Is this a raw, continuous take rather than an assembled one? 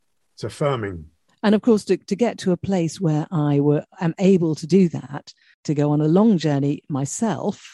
no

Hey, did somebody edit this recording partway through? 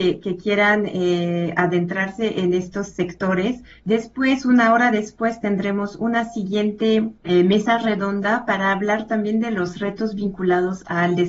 yes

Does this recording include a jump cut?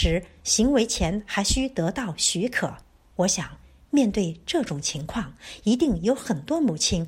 yes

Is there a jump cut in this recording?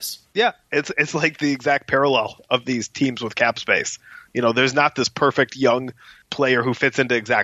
no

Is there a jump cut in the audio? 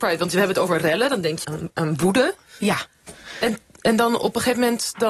yes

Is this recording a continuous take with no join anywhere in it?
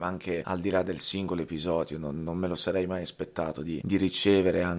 yes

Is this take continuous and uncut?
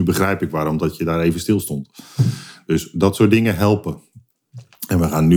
yes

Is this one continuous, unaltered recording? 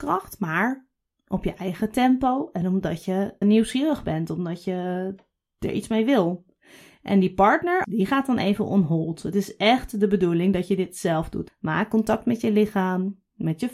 no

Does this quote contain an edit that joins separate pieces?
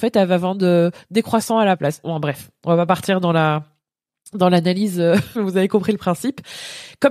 yes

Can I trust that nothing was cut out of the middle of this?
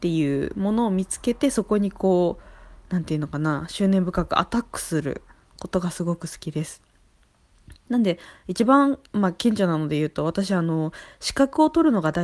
no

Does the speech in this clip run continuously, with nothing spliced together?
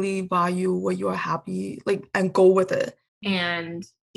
no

